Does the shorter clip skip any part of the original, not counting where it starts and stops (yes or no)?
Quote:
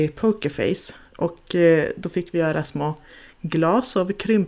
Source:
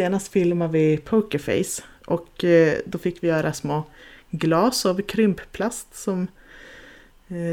no